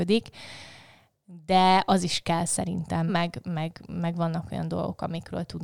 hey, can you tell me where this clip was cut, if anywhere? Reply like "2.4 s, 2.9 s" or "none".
3.1 s